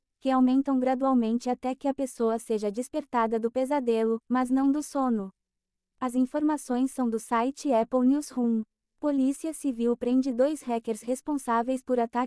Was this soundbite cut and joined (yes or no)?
no